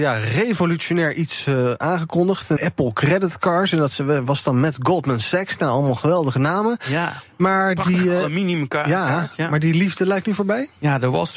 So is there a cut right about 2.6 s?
yes; 1 cut; at 2.6 s

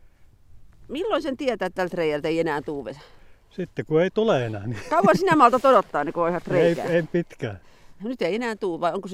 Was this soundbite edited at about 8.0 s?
yes; 1 cut; at 8.0 s

